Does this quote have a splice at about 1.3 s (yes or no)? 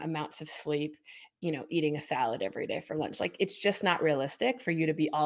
yes